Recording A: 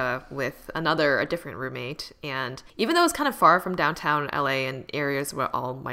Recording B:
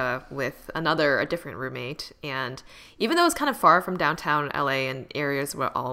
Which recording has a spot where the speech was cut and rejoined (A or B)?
A